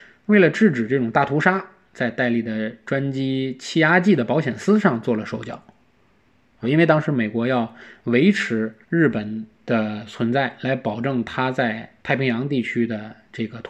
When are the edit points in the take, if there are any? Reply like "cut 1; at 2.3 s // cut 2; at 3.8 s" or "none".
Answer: cut 1; at 6.6 s // cut 2; at 8.8 s // cut 3; at 12.0 s